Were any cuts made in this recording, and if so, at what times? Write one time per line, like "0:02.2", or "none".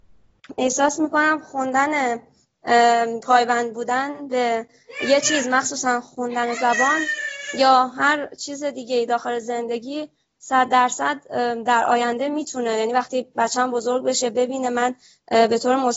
none